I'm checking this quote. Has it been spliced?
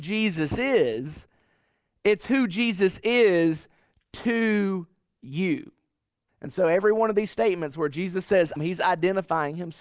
yes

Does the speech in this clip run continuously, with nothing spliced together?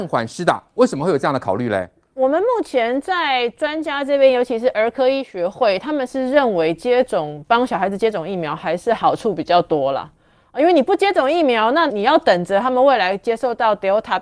no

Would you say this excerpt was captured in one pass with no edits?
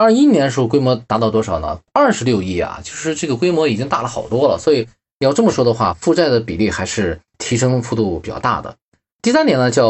yes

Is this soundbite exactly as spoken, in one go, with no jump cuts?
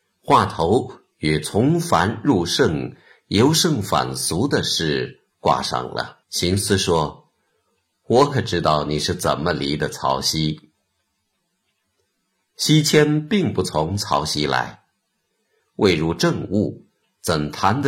no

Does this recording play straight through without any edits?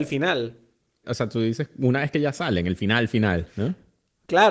no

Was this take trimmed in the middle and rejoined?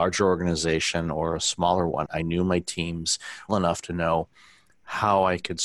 yes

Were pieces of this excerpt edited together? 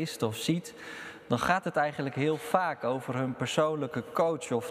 no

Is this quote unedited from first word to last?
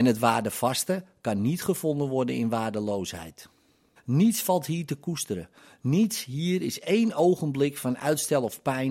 no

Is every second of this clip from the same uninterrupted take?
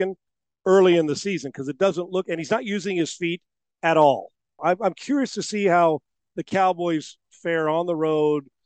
no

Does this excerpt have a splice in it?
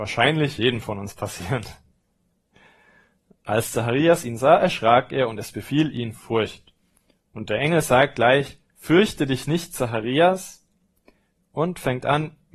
no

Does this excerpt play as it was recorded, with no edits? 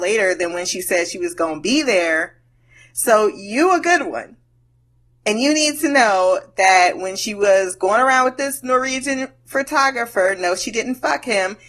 yes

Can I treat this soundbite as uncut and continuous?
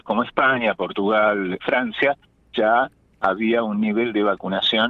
no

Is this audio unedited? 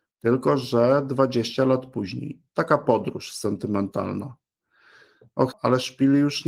no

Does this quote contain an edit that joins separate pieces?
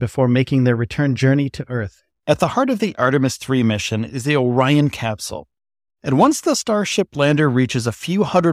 yes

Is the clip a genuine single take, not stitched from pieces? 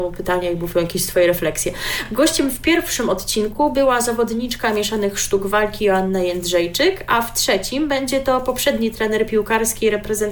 yes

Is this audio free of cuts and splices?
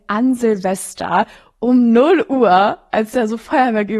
yes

